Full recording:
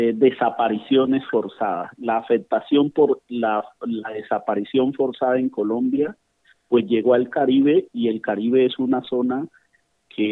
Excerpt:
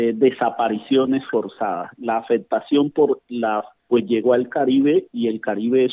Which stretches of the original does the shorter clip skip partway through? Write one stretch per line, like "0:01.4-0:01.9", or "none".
0:03.8-0:06.6